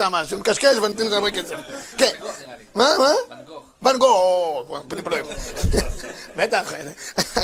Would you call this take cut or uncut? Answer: uncut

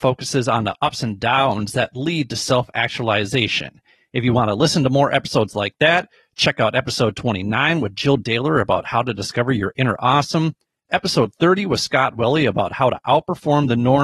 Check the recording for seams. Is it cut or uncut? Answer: uncut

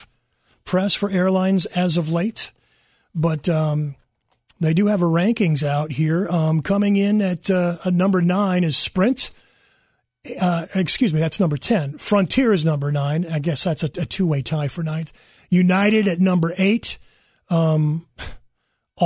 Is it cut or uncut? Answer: uncut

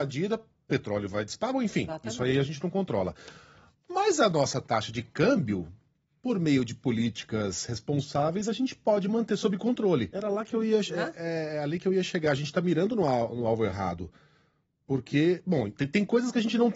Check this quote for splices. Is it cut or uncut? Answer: cut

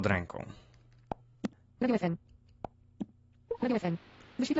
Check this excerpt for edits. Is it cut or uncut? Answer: cut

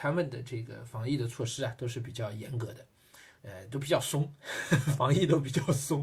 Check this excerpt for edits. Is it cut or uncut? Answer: cut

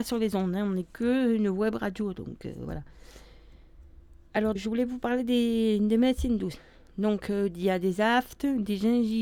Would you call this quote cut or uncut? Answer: cut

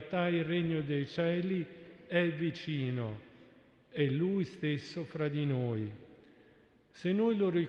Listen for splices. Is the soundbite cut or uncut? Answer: uncut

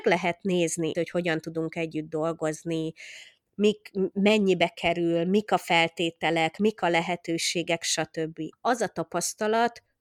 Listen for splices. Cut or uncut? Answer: cut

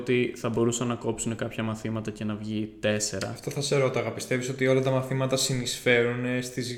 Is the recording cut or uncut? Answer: uncut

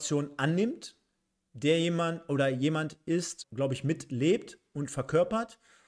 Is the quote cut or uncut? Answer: cut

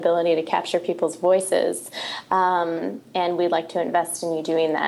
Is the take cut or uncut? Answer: uncut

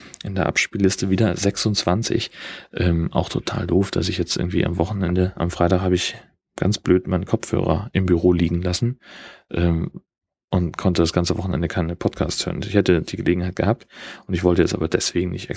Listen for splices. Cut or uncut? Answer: uncut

